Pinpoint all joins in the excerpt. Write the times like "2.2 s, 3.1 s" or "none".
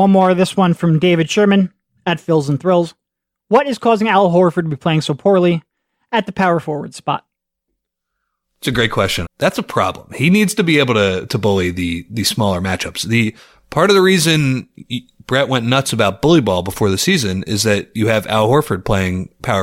9.2 s